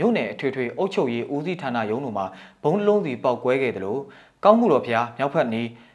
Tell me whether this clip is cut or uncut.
uncut